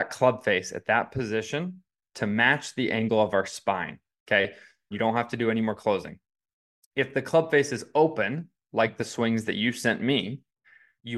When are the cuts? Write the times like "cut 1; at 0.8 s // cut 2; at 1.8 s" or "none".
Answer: cut 1; at 4.9 s